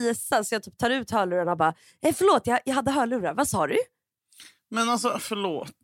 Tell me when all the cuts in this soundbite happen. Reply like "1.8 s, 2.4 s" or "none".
none